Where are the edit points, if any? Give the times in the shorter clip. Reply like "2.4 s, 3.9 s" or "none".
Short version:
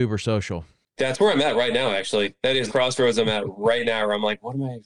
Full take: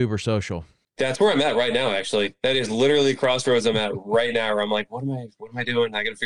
2.7 s